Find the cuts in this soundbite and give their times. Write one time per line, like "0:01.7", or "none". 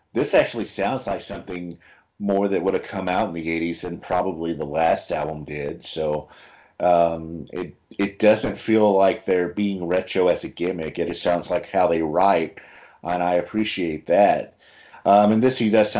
0:11.1
0:14.9